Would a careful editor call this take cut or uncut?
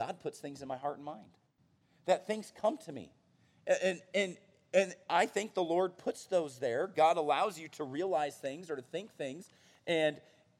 uncut